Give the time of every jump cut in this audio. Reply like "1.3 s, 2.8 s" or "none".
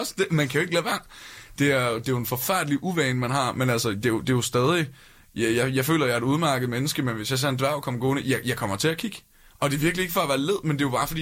none